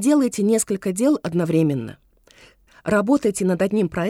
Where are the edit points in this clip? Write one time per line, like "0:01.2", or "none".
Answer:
0:02.7